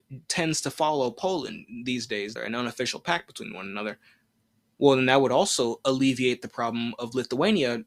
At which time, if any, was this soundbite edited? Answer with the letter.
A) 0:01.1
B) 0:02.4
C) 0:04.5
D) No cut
B